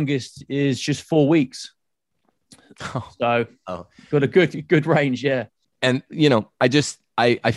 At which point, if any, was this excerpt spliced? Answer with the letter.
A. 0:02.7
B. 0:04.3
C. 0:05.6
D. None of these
C